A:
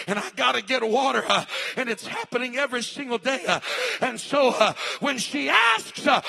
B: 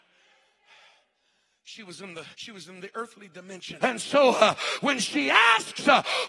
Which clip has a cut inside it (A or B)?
B